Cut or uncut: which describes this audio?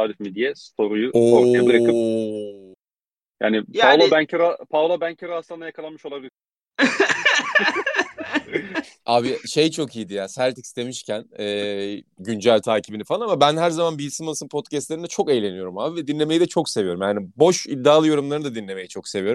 cut